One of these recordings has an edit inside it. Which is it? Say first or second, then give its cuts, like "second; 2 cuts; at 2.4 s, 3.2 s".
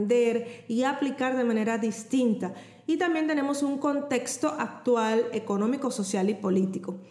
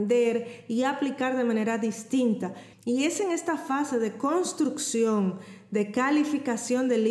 second; 1 cut; at 2.7 s